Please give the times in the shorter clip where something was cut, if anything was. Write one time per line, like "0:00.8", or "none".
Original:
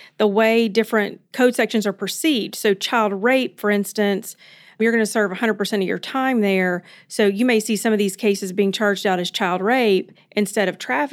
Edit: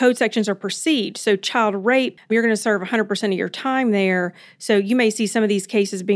0:02.2